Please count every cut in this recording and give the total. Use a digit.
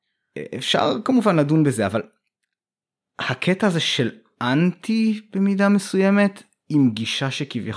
0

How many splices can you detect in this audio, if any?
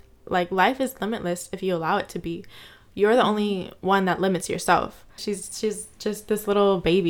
1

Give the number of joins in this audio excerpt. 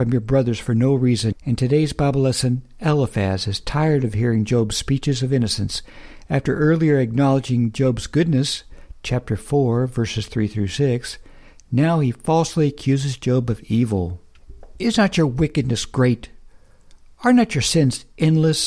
1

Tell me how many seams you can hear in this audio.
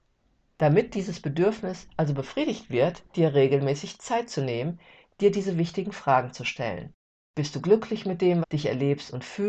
2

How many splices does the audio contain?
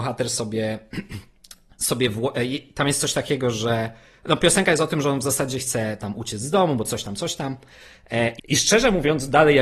1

